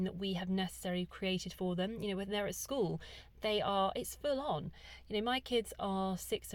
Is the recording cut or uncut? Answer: uncut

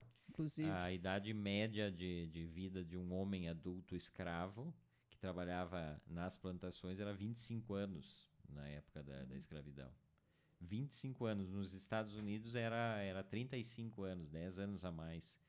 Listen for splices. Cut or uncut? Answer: uncut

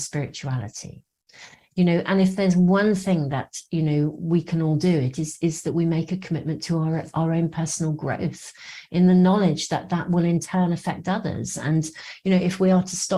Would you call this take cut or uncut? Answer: uncut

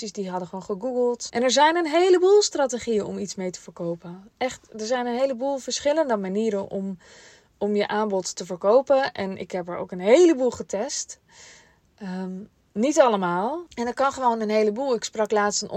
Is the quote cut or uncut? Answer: cut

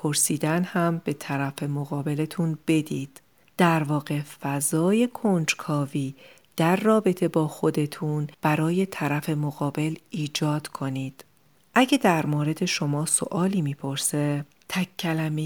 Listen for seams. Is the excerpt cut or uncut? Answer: uncut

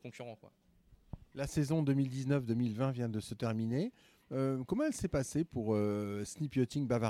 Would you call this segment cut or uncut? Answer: uncut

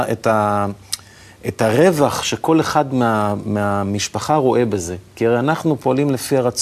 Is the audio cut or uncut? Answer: uncut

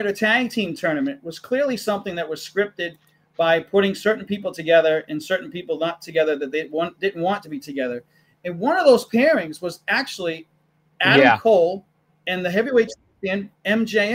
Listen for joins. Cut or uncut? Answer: uncut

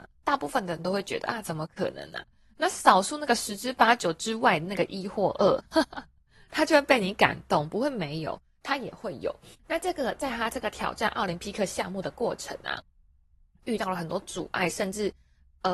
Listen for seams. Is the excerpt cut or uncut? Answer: cut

